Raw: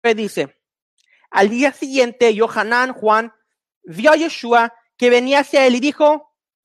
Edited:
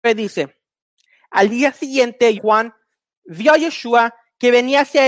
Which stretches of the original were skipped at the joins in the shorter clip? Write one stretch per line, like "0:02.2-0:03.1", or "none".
0:02.4-0:02.9